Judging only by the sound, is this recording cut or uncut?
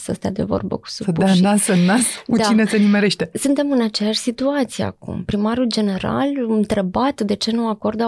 uncut